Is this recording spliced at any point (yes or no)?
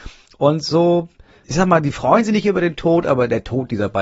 no